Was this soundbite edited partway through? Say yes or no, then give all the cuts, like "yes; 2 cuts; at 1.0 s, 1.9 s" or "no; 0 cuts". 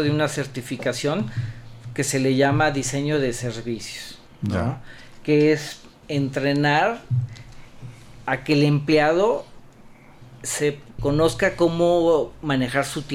yes; 2 cuts; at 6.0 s, 11.0 s